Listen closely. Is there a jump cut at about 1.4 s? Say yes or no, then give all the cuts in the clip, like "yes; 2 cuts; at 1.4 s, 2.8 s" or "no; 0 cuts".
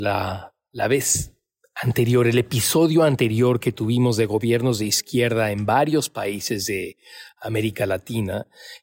no; 0 cuts